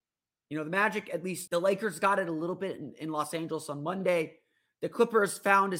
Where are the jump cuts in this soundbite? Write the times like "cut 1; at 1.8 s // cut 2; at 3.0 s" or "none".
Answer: cut 1; at 1.5 s